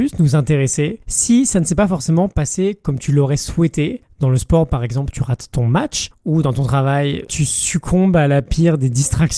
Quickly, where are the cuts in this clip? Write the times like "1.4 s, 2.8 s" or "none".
none